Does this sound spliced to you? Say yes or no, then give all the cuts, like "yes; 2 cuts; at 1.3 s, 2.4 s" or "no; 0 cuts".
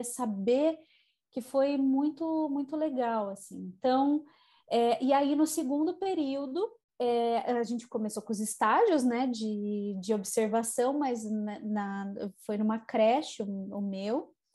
no; 0 cuts